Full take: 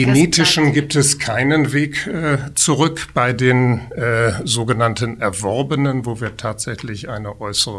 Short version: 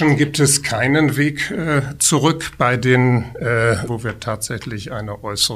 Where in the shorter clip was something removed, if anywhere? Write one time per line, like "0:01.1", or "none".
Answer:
0:03.9

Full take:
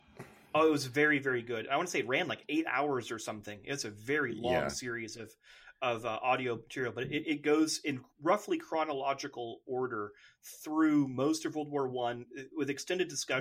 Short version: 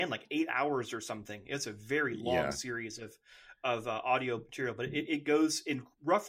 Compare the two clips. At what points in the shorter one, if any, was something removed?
none

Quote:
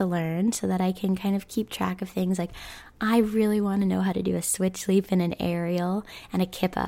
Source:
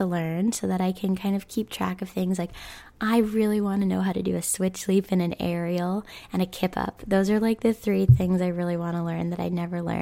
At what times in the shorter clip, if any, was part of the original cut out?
none

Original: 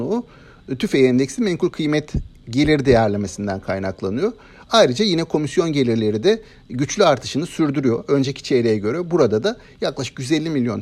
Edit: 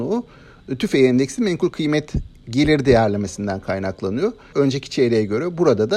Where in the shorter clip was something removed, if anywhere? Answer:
0:04.5

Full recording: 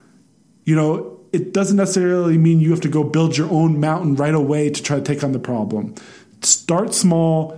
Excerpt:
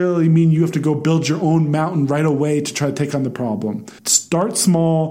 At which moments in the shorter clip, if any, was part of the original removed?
0:04.0

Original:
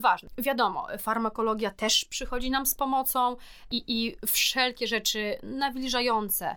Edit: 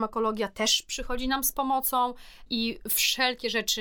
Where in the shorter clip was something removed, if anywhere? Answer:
0:02.5

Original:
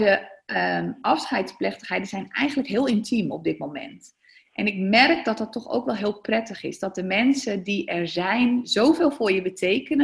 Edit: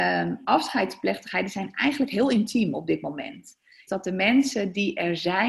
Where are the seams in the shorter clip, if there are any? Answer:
0:03.9

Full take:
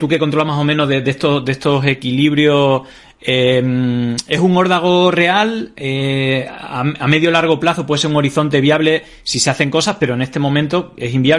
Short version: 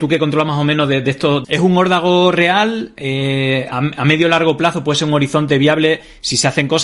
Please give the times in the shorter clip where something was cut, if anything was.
0:01.4
0:03.7

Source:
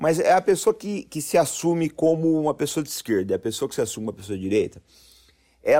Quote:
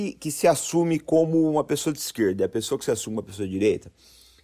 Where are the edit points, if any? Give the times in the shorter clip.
none

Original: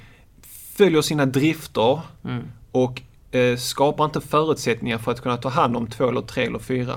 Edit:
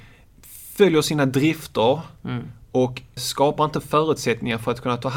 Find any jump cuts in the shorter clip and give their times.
0:03.2

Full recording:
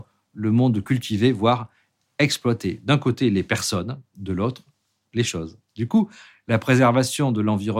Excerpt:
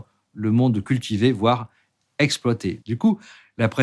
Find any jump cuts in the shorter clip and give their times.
0:02.8

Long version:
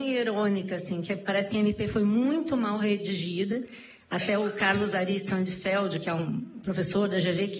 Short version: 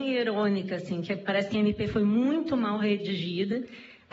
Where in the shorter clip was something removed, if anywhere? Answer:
none

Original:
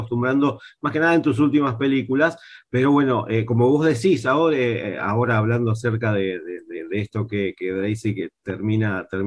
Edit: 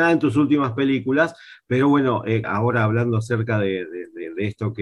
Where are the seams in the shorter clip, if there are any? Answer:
0:02.4

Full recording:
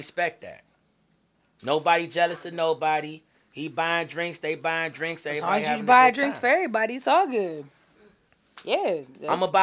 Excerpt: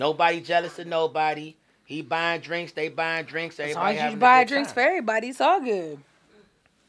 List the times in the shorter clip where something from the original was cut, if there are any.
none

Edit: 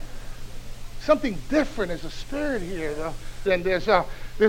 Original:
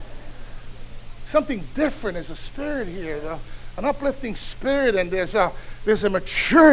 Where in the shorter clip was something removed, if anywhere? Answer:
0:03.5

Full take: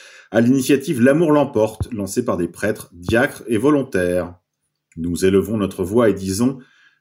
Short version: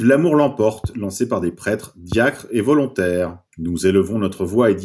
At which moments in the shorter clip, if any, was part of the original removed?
0:03.5

